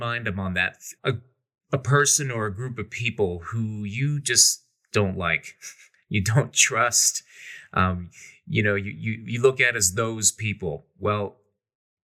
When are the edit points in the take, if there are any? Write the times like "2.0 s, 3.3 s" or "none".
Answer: 1.0 s